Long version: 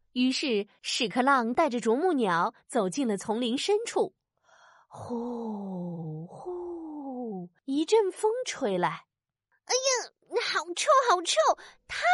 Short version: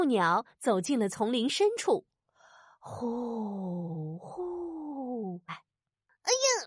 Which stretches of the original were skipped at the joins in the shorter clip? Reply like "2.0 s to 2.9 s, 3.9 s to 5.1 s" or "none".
7.6 s to 8.9 s